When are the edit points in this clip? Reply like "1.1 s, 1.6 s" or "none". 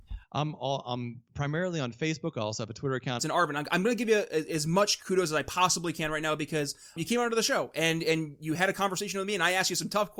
3.2 s, 7.0 s